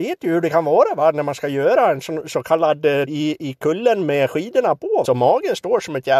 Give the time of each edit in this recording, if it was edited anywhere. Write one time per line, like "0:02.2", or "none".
0:03.1
0:05.0